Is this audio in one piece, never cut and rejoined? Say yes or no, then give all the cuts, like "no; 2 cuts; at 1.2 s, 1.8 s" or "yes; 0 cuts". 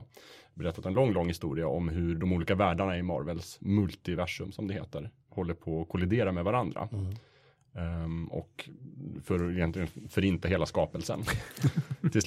yes; 0 cuts